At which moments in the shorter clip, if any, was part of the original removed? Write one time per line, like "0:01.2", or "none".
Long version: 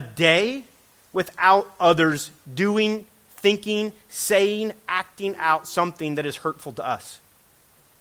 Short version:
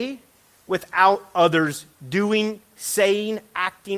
0:02.7